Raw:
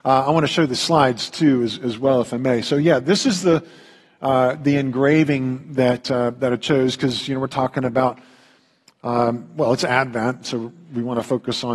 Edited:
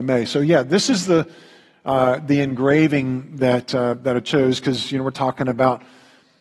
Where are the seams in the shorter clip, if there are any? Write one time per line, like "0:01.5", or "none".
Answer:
none